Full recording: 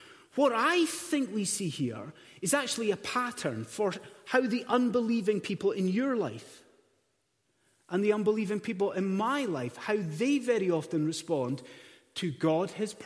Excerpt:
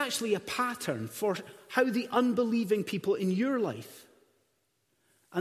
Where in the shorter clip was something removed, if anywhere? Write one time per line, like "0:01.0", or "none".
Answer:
none

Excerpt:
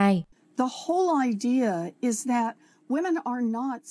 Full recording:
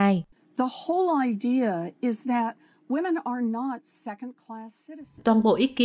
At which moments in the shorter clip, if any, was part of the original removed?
none

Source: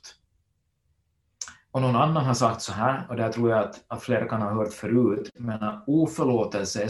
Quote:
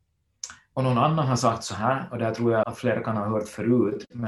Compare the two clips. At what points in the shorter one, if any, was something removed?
0:02.6

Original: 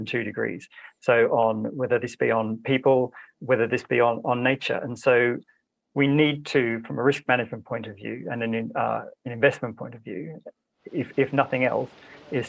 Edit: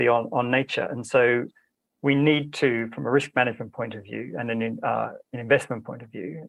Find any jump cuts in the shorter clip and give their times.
none

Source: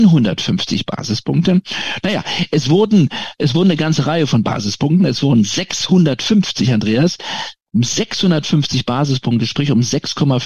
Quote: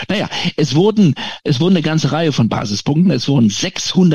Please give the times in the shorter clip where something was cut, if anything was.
none

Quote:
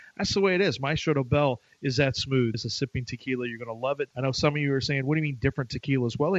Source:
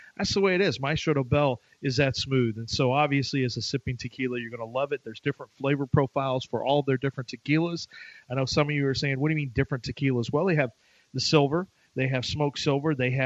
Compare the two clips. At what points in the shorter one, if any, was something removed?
0:02.5
0:04.1

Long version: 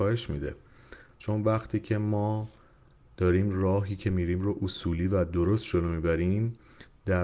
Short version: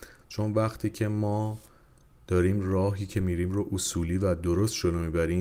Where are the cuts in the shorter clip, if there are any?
none

